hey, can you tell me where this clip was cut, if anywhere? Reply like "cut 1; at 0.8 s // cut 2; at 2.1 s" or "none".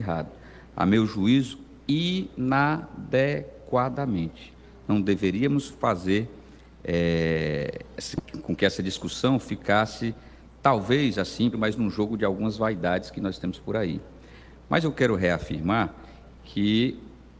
cut 1; at 11.5 s